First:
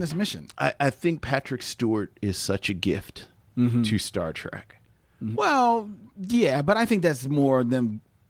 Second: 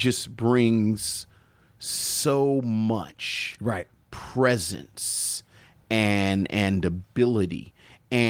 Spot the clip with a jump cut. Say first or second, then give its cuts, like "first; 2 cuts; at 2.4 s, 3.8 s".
first; 1 cut; at 5.3 s